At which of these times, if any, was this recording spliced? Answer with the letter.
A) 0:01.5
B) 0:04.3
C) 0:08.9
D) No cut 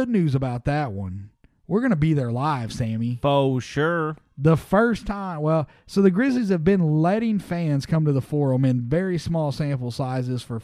D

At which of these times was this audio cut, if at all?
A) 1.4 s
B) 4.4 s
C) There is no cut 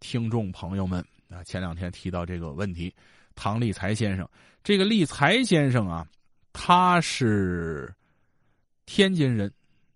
C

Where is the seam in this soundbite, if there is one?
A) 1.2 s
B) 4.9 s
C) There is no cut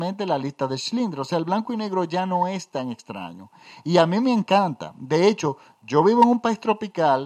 C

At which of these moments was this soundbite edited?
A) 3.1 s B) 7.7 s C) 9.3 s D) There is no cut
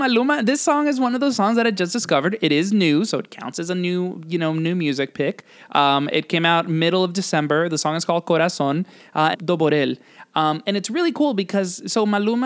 C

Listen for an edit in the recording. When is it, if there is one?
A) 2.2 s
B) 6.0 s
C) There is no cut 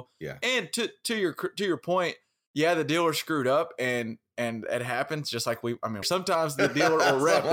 B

